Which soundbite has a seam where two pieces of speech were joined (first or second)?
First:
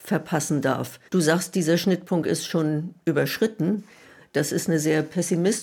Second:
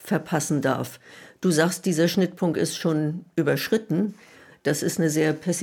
first